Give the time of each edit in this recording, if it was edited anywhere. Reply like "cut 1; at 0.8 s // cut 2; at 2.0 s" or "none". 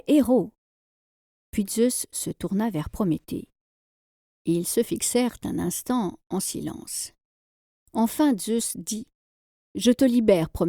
none

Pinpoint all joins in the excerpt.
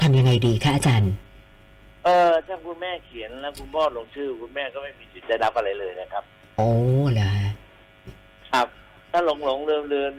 none

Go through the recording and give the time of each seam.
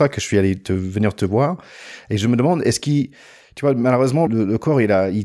cut 1; at 4.3 s

